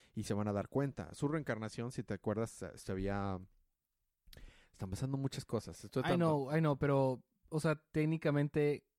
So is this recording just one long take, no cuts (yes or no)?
yes